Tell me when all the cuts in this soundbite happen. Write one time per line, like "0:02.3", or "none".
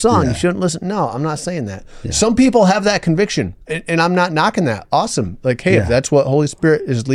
0:03.6